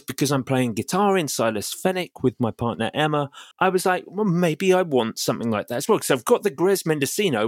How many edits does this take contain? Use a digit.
1